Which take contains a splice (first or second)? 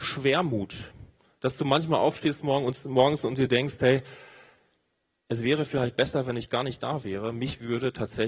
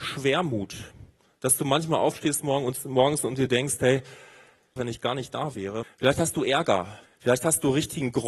second